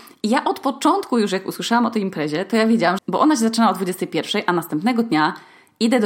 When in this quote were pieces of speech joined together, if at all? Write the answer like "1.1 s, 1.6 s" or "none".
3.0 s

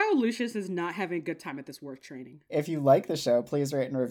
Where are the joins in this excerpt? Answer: 2.5 s

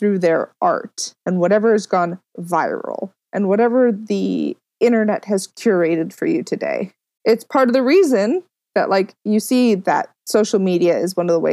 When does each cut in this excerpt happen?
1.2 s, 8.7 s

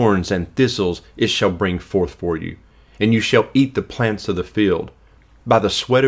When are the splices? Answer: none

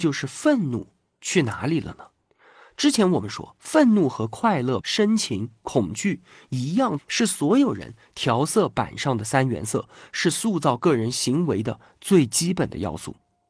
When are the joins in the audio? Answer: 4.8 s, 7.0 s

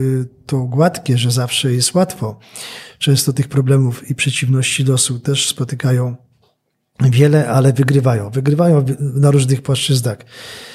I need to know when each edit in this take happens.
none

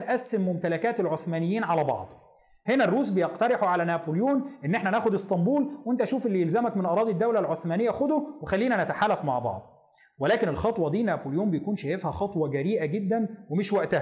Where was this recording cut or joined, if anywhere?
none

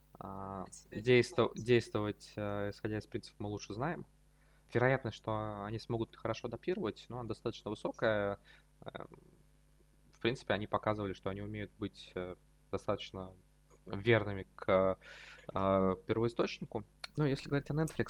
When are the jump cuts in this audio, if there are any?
4.7 s, 17.1 s

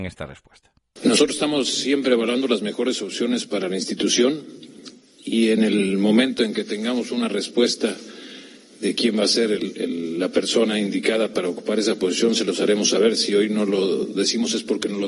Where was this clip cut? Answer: none

